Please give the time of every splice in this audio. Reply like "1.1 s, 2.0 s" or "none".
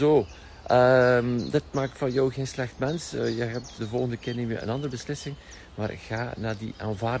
3.8 s